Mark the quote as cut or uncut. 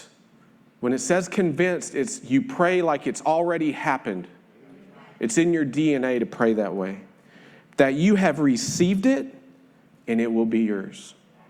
uncut